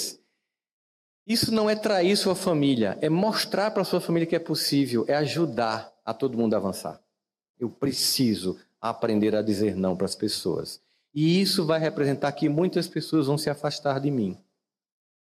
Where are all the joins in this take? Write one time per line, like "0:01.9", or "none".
0:07.5